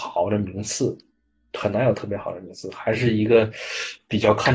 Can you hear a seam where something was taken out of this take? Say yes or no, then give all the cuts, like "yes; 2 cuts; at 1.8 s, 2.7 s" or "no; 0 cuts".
no; 0 cuts